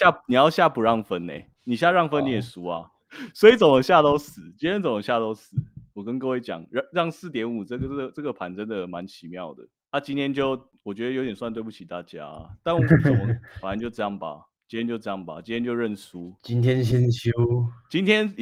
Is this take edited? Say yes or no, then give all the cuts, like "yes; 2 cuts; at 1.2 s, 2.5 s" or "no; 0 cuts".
no; 0 cuts